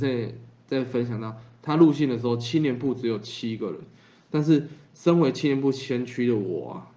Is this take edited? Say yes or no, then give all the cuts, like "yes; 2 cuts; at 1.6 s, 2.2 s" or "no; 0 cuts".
no; 0 cuts